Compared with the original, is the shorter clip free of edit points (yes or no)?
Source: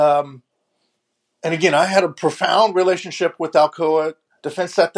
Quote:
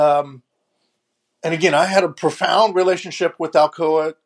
yes